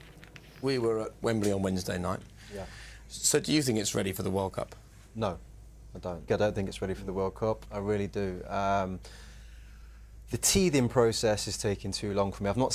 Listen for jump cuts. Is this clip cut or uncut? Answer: cut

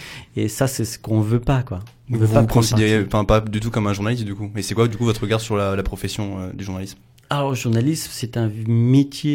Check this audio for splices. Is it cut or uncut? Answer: uncut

